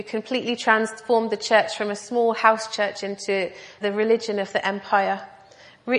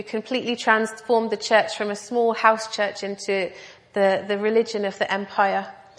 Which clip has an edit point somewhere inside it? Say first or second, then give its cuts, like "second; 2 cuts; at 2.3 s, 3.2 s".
first; 1 cut; at 3.8 s